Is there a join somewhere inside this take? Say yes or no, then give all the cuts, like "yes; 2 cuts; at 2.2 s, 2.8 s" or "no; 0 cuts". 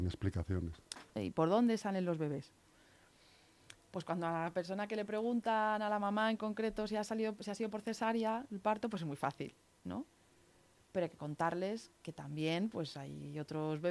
yes; 1 cut; at 1.2 s